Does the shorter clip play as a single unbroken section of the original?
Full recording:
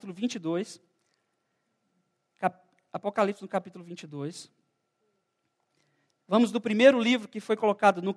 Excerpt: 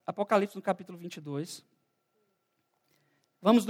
yes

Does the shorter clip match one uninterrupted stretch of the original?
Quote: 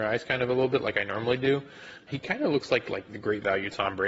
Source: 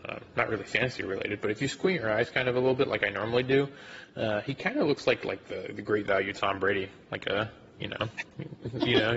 no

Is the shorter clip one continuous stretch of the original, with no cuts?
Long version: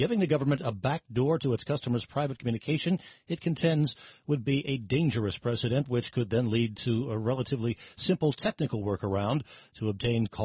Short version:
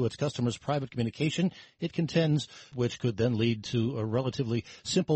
no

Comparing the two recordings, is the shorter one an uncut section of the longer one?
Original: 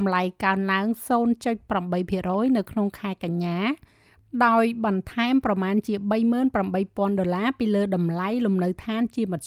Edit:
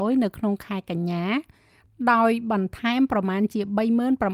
yes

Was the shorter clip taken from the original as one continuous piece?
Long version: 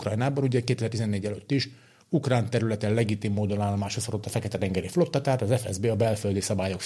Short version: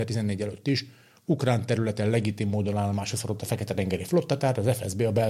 yes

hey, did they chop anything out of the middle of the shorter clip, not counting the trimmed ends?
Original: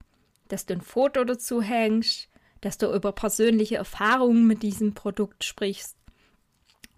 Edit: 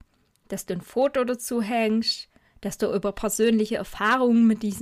no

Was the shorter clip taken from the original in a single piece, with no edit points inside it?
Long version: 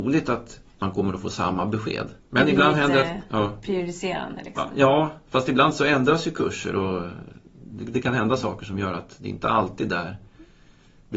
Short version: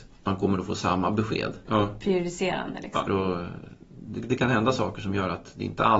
no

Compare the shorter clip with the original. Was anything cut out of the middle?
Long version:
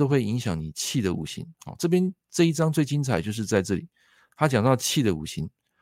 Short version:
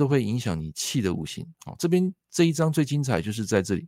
no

